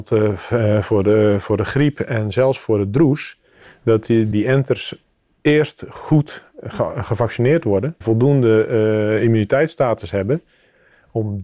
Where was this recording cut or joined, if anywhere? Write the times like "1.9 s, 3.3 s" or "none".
4.3 s, 8.0 s